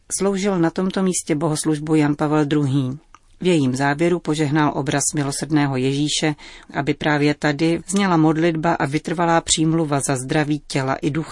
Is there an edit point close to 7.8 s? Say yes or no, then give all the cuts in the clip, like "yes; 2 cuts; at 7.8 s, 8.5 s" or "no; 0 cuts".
yes; 2 cuts; at 6.6 s, 7.8 s